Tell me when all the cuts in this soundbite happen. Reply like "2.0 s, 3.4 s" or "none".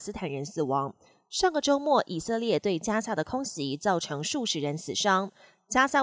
none